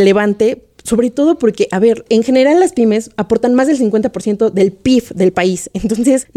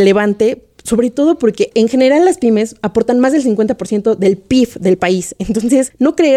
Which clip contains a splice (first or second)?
second